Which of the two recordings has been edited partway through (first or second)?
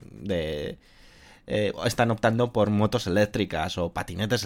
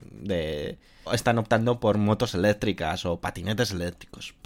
second